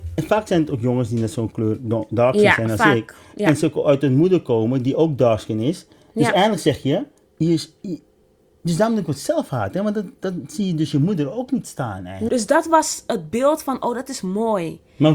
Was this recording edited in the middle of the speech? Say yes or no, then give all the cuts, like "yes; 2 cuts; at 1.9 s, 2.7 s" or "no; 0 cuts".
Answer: yes; 2 cuts; at 7.3 s, 12.3 s